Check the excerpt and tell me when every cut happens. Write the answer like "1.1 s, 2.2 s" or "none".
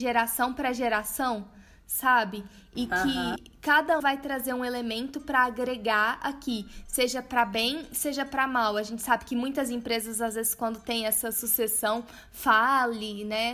4.0 s